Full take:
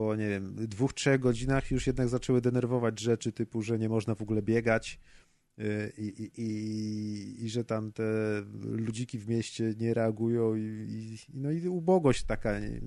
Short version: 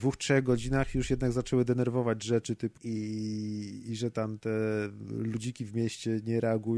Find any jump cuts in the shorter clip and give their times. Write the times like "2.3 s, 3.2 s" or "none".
2.8 s